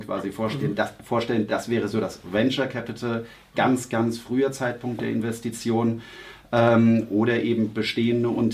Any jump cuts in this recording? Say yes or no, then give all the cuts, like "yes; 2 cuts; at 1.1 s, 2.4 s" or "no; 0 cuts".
no; 0 cuts